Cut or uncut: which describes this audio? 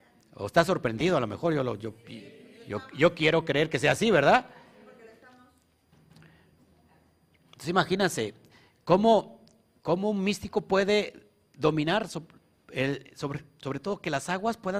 uncut